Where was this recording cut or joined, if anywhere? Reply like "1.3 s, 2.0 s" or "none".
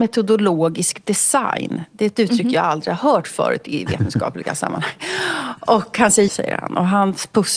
6.3 s